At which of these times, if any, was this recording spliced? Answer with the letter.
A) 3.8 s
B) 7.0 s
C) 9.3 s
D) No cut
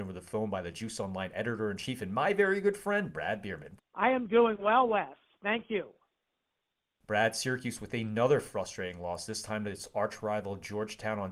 A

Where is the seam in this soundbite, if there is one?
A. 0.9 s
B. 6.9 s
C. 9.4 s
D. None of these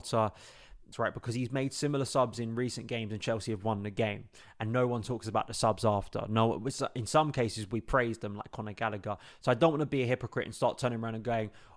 A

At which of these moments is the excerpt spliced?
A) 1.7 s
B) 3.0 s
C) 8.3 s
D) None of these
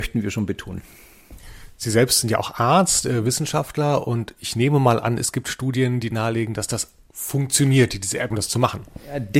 C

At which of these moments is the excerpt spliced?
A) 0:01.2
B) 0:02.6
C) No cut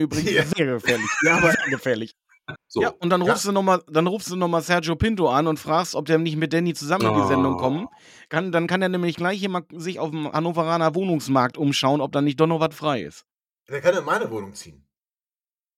B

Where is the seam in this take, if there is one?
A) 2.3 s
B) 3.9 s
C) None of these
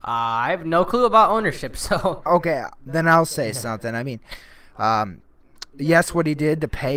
A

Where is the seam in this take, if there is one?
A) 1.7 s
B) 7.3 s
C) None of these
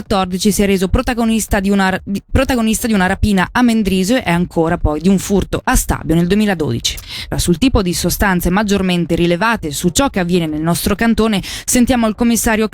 B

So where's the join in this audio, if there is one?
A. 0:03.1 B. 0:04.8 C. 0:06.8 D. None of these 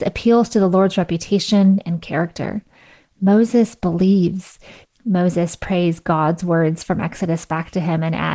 B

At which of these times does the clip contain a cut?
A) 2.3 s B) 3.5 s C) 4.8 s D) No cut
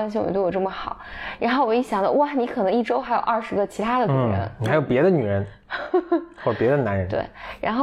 D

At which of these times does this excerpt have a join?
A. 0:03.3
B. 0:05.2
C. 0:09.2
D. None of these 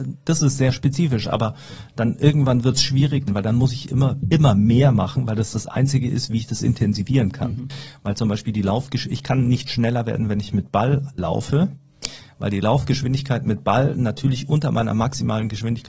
A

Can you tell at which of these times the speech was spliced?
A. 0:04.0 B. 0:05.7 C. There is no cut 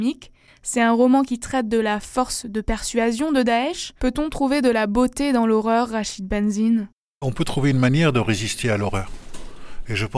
A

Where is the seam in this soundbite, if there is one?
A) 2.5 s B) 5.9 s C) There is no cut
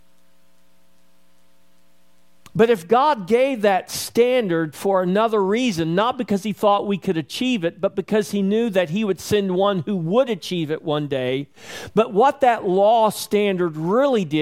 A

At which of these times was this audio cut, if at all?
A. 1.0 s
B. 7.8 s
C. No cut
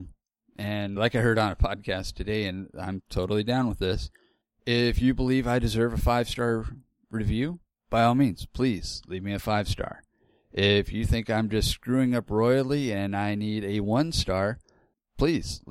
A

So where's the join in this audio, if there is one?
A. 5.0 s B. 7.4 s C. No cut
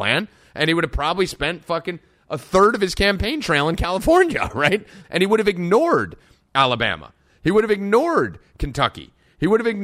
A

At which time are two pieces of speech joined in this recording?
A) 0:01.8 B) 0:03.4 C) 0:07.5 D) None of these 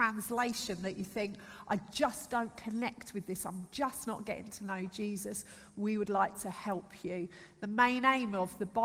D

